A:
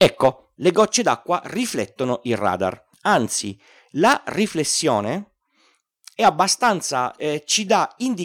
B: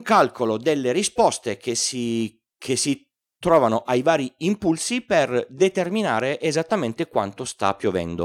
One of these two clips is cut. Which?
A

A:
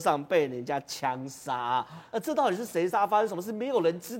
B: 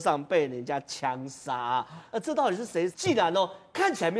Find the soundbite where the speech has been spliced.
B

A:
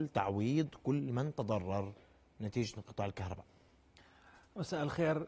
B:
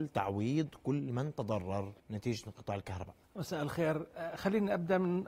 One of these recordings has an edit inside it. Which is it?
B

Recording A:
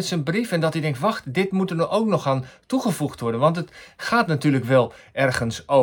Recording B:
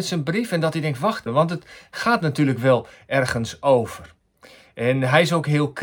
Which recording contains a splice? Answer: B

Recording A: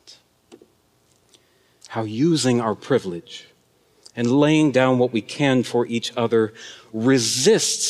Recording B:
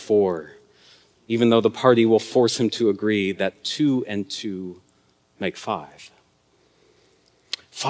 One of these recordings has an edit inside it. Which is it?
A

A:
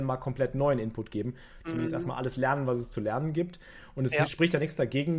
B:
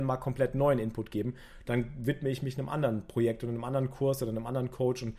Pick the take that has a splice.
A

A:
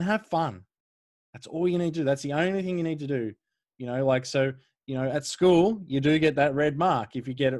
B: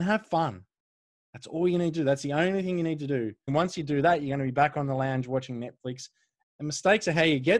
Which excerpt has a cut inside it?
B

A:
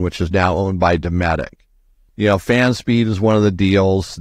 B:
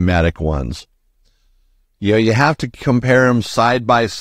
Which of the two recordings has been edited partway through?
A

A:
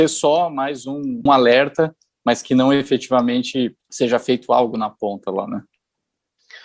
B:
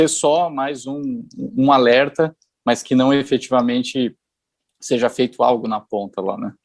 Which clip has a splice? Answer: A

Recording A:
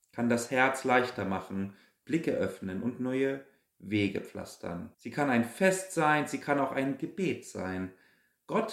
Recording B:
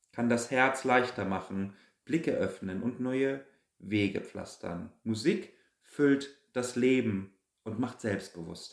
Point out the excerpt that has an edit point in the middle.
A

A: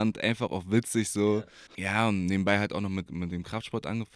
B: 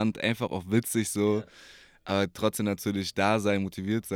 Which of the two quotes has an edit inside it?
A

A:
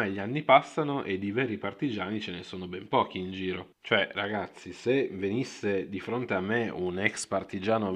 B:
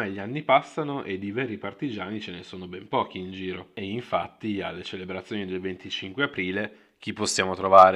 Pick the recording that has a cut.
A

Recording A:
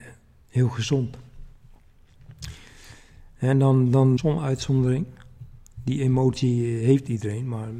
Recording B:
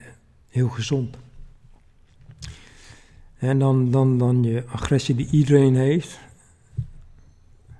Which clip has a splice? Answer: A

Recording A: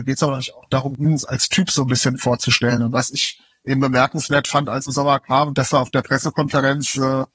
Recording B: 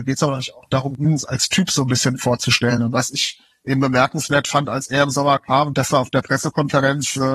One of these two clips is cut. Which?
A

